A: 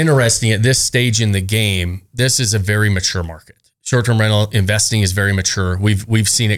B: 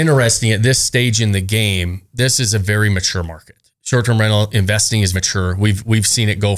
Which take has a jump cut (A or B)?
B